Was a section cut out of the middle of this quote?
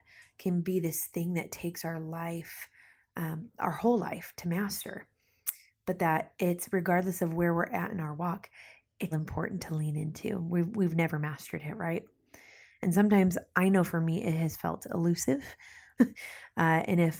yes; 2 cuts; at 9.1 s, 16.0 s

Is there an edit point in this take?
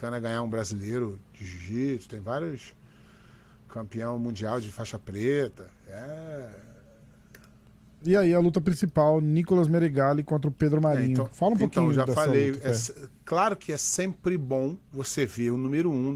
yes; 1 cut; at 8.0 s

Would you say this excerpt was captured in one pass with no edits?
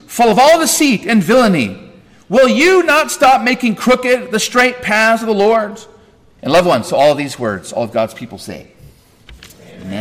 no; 1 cut; at 6.4 s

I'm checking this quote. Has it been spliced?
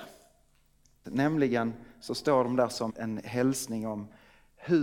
yes; 2 cuts; at 1.0 s, 2.9 s

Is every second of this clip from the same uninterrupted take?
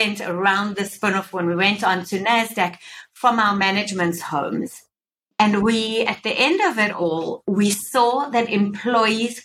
yes; 0 cuts

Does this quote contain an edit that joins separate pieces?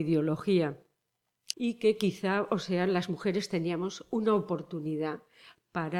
yes; 1 cut; at 1.5 s

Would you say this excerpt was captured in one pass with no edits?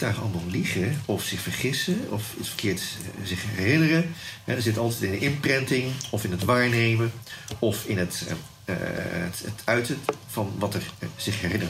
yes; 0 cuts

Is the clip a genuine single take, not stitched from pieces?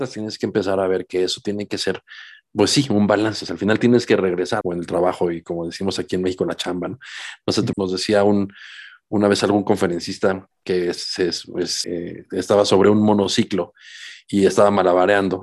no; 3 cuts; at 4.6 s, 7.7 s, 11.8 s

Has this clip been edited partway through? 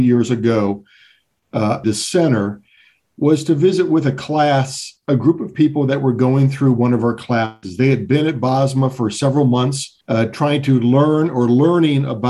yes; 2 cuts; at 1.8 s, 10.0 s

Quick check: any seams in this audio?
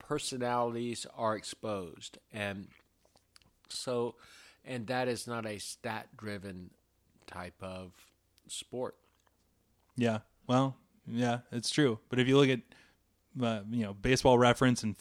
no; 0 cuts

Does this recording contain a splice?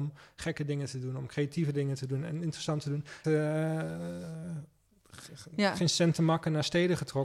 yes; 1 cut; at 3.2 s

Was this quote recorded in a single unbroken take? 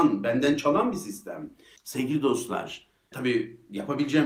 no; 2 cuts; at 1.8 s, 3.1 s

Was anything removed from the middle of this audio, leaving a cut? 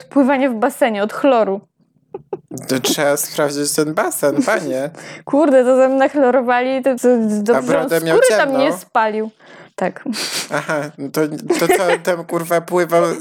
yes; 1 cut; at 7.0 s

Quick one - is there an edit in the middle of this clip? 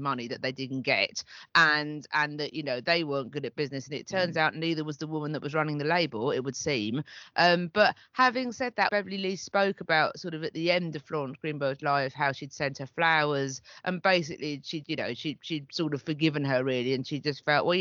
yes; 2 cuts; at 8.9 s, 14.8 s

